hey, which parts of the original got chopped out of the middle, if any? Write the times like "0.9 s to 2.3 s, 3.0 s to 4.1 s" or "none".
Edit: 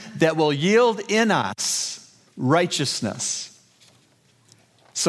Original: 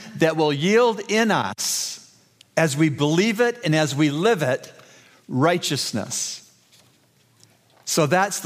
2.3 s to 5.2 s